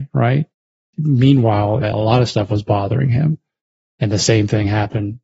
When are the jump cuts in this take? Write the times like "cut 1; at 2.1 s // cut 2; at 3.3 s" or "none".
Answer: cut 1; at 1.8 s